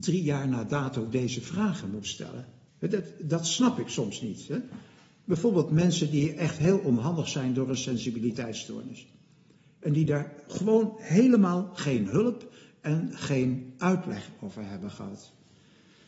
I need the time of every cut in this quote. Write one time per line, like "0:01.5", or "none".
0:02.7